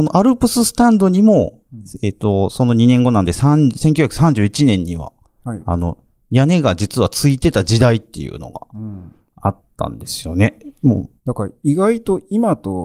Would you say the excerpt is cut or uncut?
cut